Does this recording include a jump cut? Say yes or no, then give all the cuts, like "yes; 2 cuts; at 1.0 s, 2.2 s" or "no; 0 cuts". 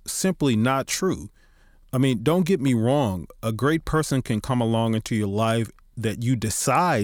no; 0 cuts